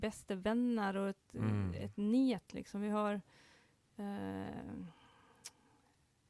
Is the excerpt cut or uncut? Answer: uncut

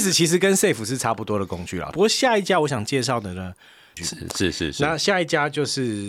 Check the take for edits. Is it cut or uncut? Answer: cut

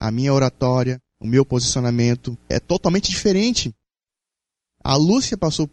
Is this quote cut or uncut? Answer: cut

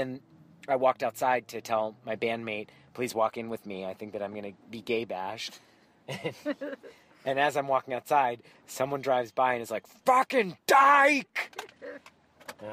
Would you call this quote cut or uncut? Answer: uncut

